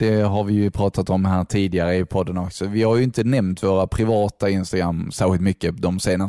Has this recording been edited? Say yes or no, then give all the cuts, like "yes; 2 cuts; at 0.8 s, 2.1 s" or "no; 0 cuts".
no; 0 cuts